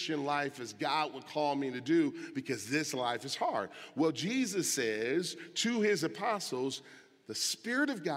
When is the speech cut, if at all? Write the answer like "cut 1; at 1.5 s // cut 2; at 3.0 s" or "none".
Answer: none